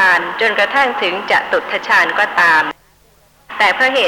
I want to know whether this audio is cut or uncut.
uncut